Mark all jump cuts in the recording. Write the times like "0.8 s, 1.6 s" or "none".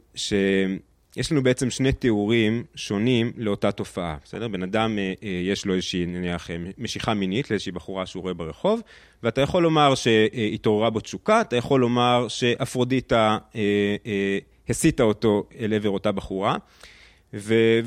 none